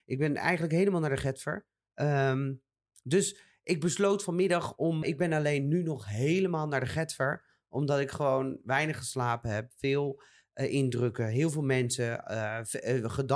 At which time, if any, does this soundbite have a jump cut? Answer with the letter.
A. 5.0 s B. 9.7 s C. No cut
A